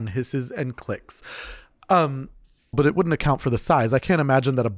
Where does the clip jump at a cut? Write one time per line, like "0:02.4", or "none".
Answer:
0:02.7